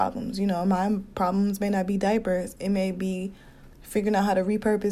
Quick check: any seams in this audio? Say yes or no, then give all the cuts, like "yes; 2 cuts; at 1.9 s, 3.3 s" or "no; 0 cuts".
yes; 1 cut; at 3.7 s